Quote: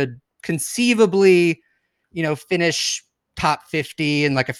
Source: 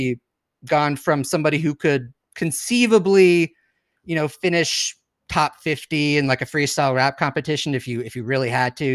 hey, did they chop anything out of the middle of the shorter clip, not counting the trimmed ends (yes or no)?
no